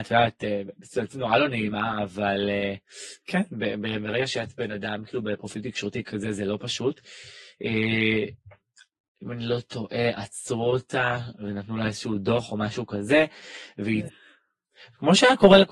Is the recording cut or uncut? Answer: cut